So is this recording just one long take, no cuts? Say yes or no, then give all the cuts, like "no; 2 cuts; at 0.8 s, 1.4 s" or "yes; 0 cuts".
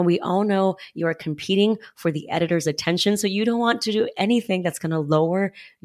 yes; 0 cuts